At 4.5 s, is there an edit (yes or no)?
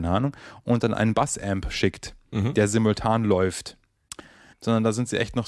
yes